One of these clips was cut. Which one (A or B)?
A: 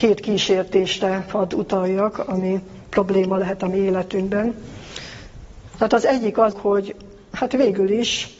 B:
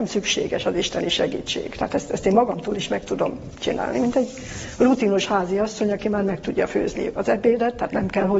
A